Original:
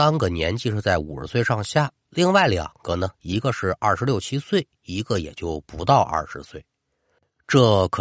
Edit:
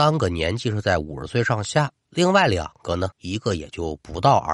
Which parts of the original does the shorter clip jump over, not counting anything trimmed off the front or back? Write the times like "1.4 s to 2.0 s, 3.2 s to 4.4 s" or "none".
3.1 s to 4.8 s